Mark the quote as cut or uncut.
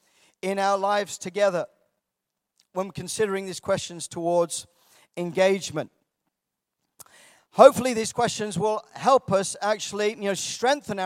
uncut